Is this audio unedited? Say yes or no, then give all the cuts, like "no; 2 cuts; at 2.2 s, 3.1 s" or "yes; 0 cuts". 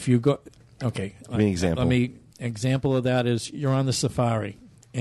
yes; 0 cuts